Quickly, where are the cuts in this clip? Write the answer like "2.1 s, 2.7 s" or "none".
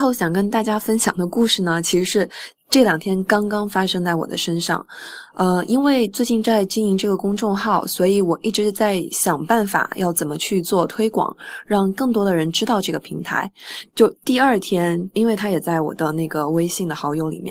13.9 s, 15.1 s